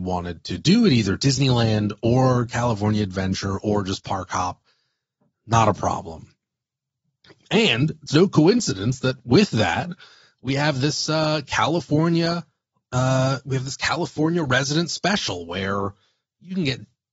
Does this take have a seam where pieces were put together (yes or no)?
no